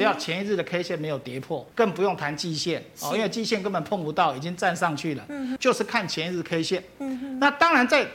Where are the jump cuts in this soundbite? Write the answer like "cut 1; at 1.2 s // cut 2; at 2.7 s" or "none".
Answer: cut 1; at 1.7 s // cut 2; at 5.6 s